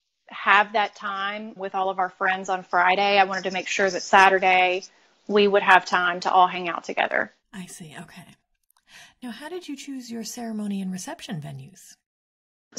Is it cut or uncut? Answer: cut